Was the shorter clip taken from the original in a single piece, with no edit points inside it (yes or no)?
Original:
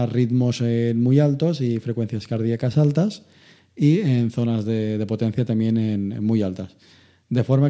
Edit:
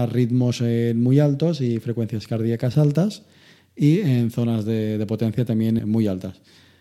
no